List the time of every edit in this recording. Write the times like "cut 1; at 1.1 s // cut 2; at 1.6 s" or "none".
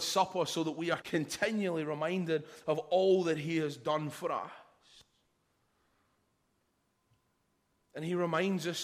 cut 1; at 1.0 s